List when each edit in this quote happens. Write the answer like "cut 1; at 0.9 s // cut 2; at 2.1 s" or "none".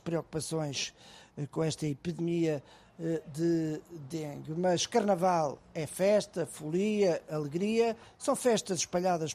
cut 1; at 8.1 s